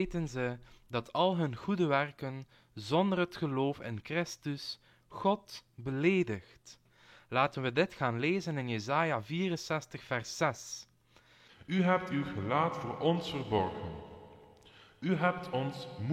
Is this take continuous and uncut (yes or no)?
no